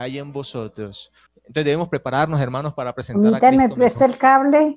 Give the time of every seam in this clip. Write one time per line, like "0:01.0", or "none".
0:01.3